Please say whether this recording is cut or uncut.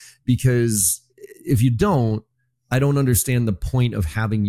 cut